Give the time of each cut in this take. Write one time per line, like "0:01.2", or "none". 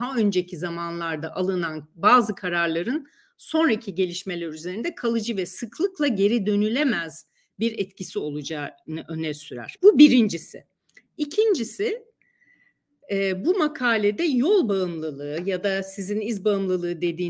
0:09.8